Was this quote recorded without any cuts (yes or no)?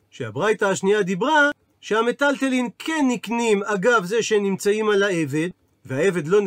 yes